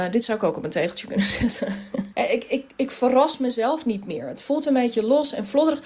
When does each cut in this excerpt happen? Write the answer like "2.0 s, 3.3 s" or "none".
2.1 s

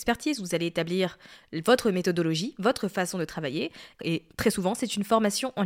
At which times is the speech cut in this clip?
4.0 s

